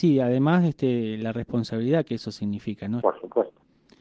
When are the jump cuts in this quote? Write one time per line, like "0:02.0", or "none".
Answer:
0:03.0